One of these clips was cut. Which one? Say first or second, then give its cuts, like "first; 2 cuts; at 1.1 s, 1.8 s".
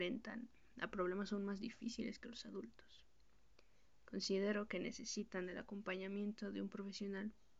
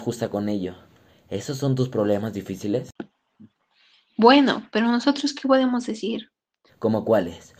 second; 1 cut; at 6.7 s